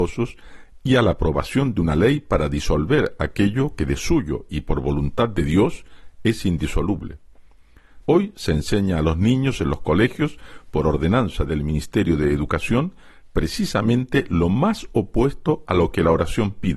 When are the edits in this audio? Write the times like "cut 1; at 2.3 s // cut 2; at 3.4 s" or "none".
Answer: cut 1; at 8.0 s